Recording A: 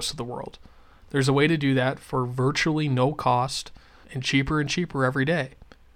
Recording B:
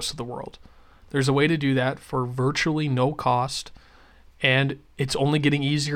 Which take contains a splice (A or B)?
A